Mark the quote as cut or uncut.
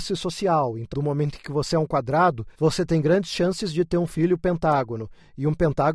cut